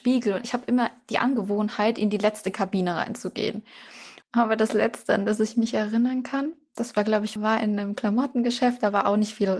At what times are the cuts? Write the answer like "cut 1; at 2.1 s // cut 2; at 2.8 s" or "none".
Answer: cut 1; at 4.2 s // cut 2; at 7.4 s